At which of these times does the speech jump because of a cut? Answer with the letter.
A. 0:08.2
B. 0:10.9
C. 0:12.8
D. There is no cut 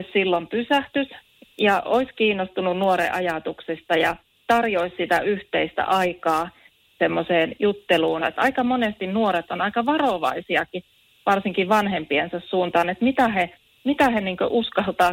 A